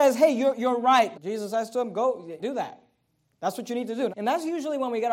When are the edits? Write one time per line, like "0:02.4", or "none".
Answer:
0:01.1
0:02.4
0:04.1